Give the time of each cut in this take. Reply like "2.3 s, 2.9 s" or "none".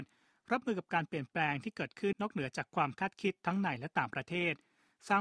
2.1 s